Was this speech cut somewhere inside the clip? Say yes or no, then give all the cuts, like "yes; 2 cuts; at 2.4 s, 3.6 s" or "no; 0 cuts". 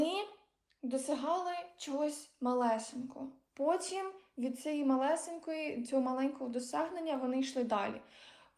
no; 0 cuts